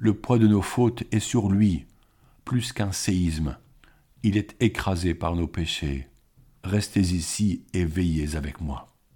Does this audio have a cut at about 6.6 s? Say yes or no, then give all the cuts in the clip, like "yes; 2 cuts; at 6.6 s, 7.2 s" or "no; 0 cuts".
yes; 1 cut; at 6.6 s